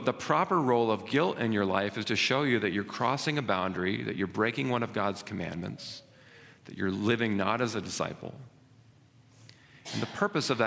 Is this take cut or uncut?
uncut